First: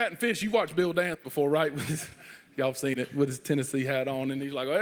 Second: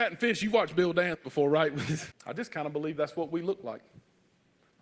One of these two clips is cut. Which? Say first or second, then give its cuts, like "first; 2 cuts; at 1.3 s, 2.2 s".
second; 1 cut; at 2.1 s